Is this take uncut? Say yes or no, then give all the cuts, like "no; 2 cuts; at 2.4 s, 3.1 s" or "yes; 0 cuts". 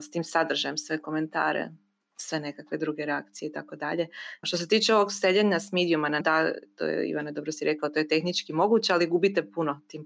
no; 2 cuts; at 4.4 s, 6.2 s